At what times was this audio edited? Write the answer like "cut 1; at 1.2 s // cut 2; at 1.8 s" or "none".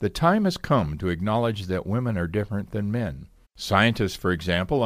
cut 1; at 3.4 s

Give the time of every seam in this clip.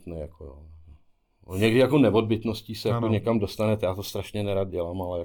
none

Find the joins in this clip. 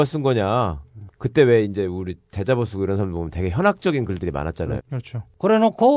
cut 1; at 1.1 s // cut 2; at 4.8 s

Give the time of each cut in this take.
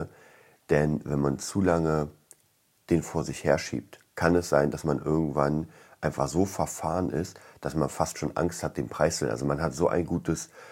cut 1; at 4.1 s

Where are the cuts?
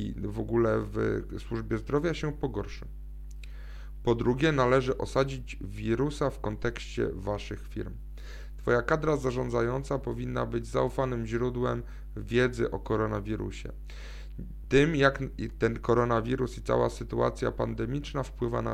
none

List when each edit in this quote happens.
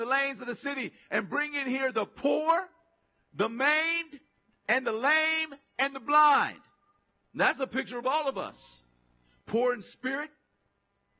none

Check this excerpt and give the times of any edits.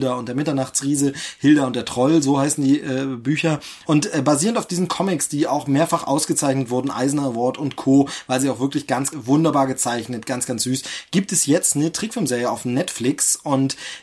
cut 1; at 3.8 s // cut 2; at 9.1 s

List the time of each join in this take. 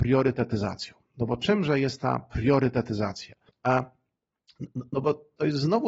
cut 1; at 3.5 s

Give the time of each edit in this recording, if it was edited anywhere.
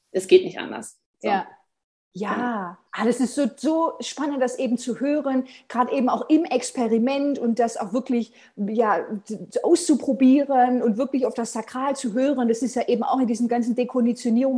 cut 1; at 2.9 s

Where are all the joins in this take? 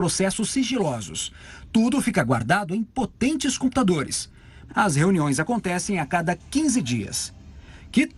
cut 1; at 4.7 s

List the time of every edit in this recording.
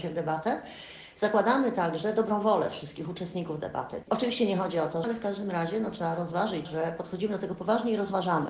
cut 1; at 4.0 s // cut 2; at 5.0 s // cut 3; at 6.7 s

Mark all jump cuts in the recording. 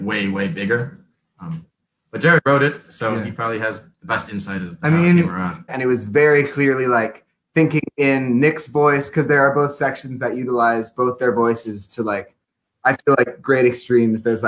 cut 1; at 5.7 s

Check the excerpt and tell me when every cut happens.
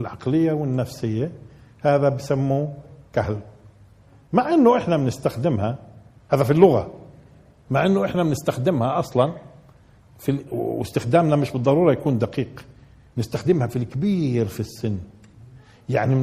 cut 1; at 10.5 s

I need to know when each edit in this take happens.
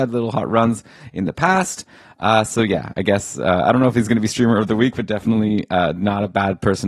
none

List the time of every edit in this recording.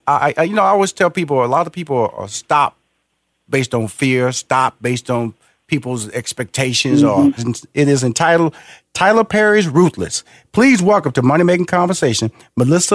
cut 1; at 7.4 s

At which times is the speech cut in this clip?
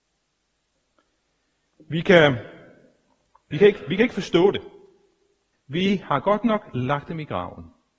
cut 1; at 5.5 s

